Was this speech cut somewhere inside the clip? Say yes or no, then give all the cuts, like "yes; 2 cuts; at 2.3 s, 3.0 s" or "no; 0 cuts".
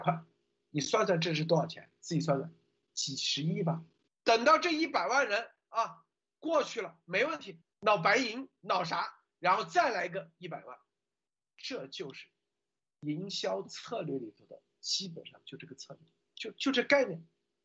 yes; 2 cuts; at 4.1 s, 7.6 s